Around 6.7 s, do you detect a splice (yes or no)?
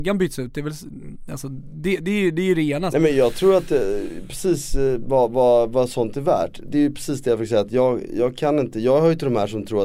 no